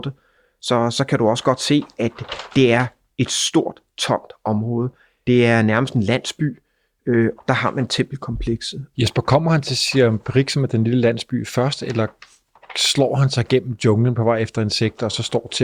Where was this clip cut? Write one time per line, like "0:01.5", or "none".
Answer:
0:05.2
0:07.4
0:08.9